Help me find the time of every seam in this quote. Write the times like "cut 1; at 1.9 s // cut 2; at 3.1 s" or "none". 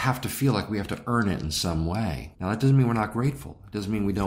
cut 1; at 2.3 s